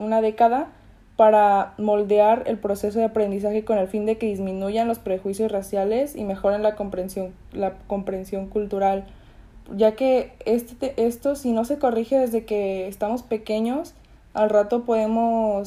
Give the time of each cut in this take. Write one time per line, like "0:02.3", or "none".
none